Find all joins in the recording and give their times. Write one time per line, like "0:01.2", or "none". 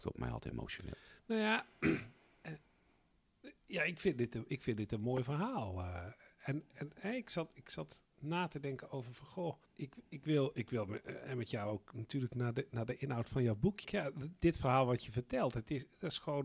0:09.7
0:13.8

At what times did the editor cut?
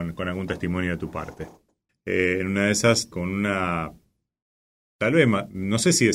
0:01.9
0:03.1

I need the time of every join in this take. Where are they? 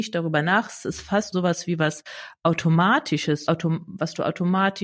0:01.3
0:03.5

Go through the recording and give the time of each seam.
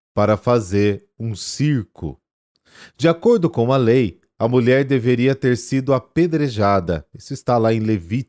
none

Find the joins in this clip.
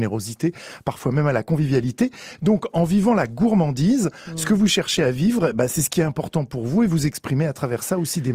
none

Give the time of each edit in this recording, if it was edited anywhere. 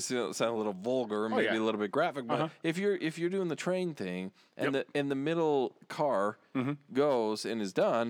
none

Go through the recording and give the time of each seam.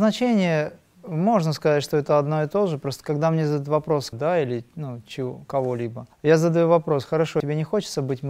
0:04.1
0:06.1
0:07.4

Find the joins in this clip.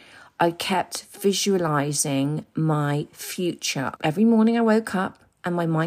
0:04.0

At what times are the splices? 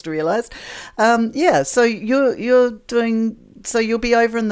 none

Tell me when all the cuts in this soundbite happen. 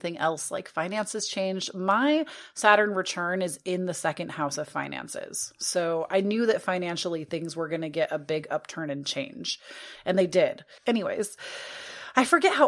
0:10.8

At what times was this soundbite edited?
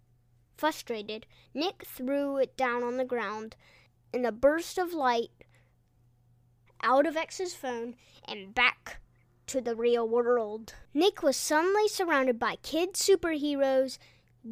0:06.7
0:10.9

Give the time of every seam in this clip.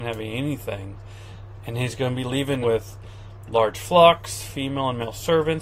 0:02.6

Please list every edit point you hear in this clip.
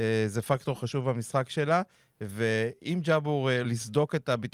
0:03.6

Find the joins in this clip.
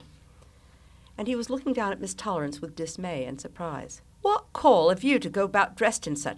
0:04.1

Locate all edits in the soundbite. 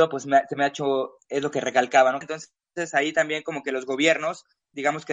0:02.2

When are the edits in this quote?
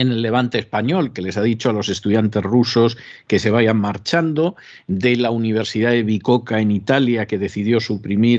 none

